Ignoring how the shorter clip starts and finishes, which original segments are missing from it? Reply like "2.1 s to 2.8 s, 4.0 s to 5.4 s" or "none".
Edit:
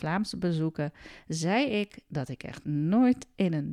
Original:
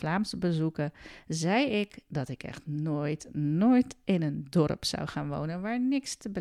2.6 s to 3.3 s

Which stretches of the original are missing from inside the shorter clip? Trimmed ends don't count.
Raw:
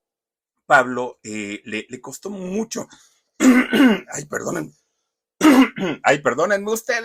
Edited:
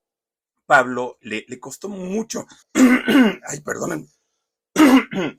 1.2 s to 1.6 s, 3.0 s to 3.3 s

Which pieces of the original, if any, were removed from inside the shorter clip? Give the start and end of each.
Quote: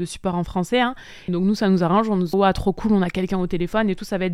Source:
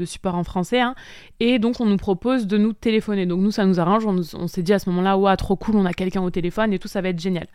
1.3 s to 3.2 s, 4.3 s to 5.2 s

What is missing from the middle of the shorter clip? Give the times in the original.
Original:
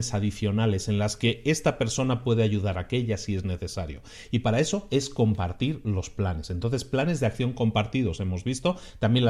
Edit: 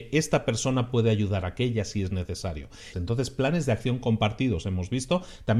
4.3 s to 6.5 s

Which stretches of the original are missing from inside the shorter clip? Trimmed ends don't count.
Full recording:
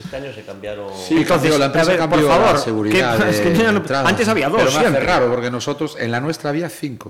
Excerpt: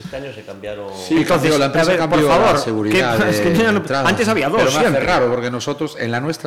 none

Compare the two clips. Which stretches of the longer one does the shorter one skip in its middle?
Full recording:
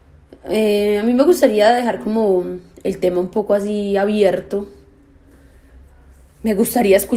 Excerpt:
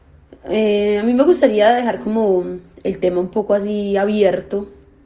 none

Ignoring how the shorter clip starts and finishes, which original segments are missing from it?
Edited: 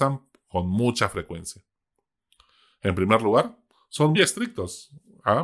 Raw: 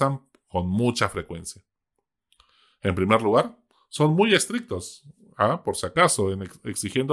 4.1 s to 4.3 s

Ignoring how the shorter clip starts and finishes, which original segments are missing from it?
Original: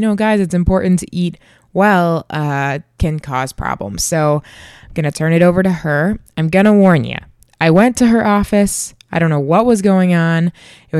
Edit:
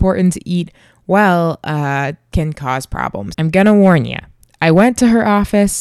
4.0 s to 6.3 s

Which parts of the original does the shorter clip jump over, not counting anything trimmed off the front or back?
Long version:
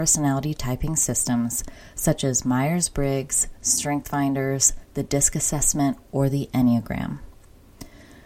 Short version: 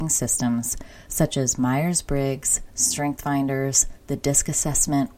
none

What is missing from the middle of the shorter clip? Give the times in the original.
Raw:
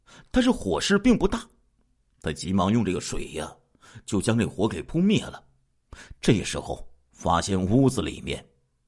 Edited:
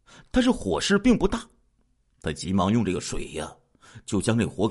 none

